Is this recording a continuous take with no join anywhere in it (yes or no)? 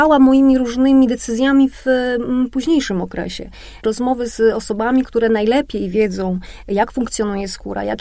no